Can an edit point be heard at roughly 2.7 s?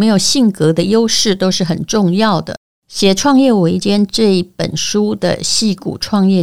yes; 1 cut; at 2.7 s

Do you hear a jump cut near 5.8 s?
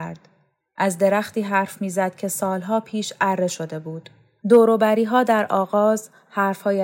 no; 1 cut; at 4.4 s

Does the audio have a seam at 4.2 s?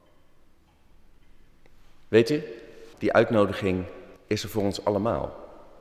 yes; 2 cuts; at 2.9 s, 4.2 s

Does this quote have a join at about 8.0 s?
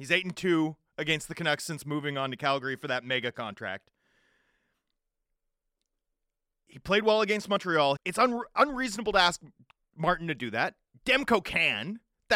yes; 1 cut; at 8.0 s

